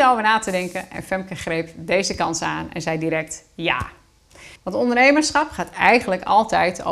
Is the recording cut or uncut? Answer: cut